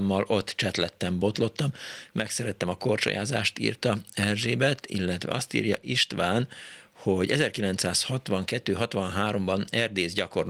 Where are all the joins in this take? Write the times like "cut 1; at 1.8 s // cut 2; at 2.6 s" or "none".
none

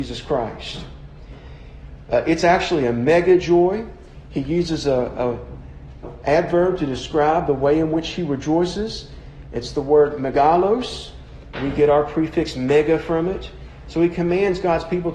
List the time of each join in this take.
cut 1; at 6.0 s // cut 2; at 13.8 s

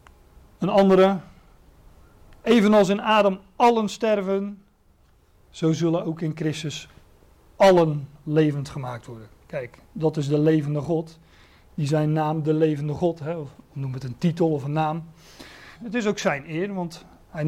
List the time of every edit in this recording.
cut 1; at 15.8 s

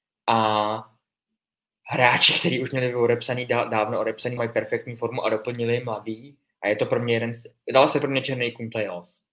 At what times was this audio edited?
cut 1; at 4.4 s

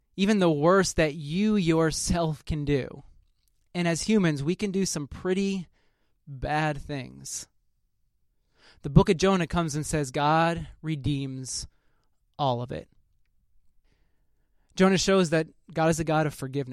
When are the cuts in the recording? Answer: none

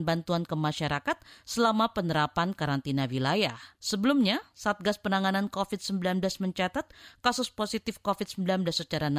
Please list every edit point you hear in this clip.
cut 1; at 3.7 s

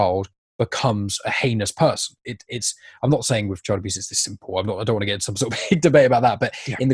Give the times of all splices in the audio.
none

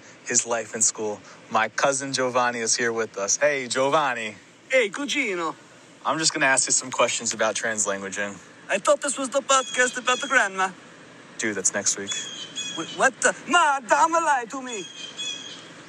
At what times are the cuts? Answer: none

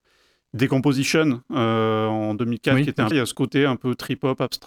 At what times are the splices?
cut 1; at 3.1 s

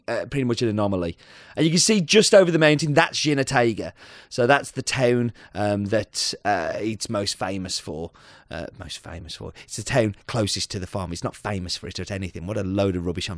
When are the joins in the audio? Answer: none

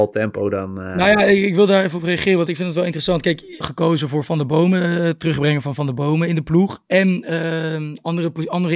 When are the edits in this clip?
cut 1; at 3.6 s

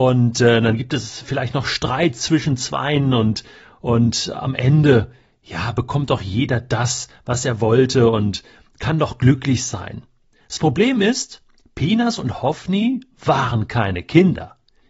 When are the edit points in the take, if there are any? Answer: none

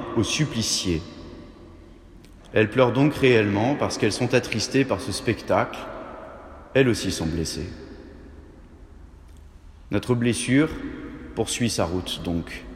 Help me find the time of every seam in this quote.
none

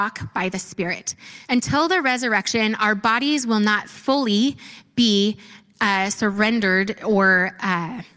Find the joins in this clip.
cut 1; at 1.4 s

